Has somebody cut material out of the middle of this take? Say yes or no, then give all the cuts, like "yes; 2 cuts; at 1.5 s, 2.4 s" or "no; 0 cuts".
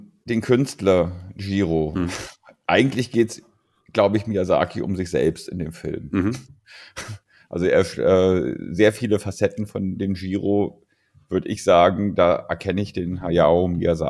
no; 0 cuts